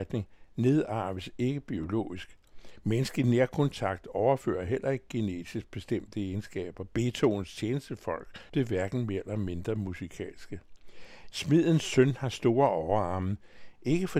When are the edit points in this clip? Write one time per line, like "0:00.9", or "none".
0:08.5
0:11.3